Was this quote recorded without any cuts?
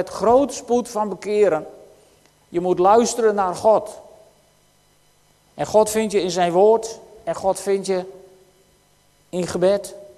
yes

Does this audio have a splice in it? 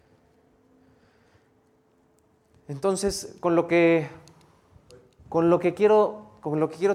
yes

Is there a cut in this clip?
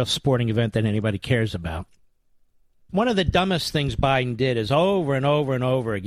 yes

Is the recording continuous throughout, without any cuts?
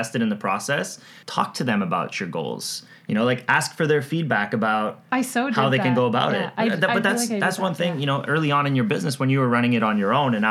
no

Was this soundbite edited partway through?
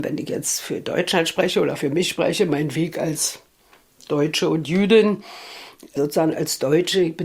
no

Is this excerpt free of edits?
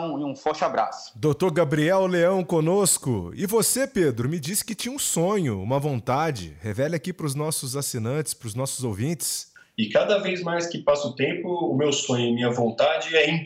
yes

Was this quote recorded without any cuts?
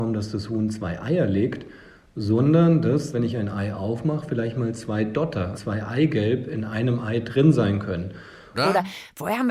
no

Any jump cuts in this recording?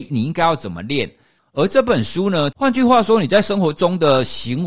yes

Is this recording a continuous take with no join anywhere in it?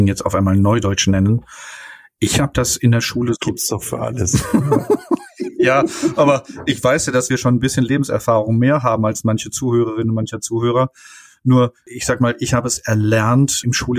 yes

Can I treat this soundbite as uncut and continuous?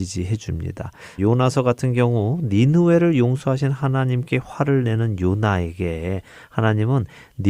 no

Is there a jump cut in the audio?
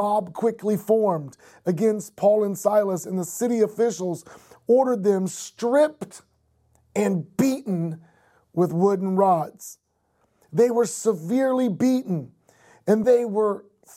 yes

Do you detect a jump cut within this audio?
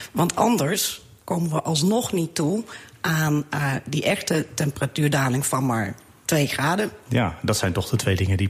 yes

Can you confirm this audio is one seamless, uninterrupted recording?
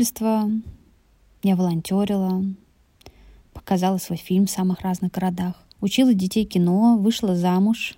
no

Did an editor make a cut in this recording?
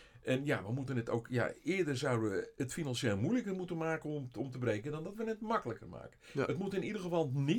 no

